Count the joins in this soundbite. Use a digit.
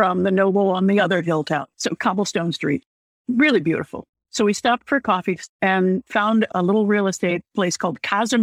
0